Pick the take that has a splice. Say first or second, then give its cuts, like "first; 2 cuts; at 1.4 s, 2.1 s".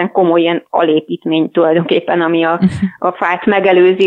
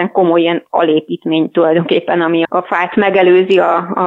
second; 1 cut; at 2.5 s